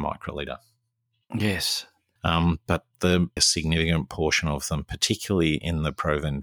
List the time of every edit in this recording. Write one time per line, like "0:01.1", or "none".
0:02.2
0:03.4